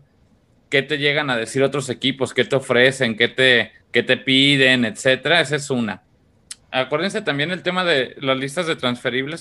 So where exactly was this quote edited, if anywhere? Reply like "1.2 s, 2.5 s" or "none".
3.8 s, 6.6 s